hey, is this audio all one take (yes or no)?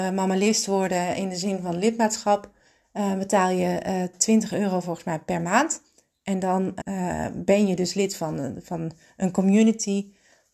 no